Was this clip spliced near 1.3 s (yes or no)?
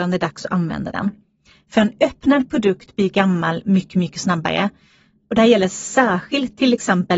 no